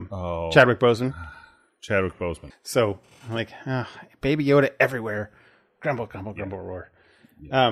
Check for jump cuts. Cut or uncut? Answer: cut